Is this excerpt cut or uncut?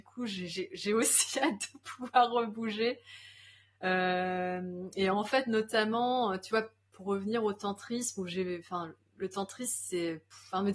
uncut